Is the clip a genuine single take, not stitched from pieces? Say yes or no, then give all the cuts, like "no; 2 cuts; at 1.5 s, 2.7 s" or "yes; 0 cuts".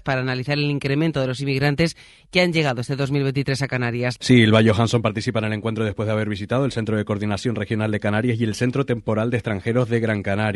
no; 1 cut; at 4.1 s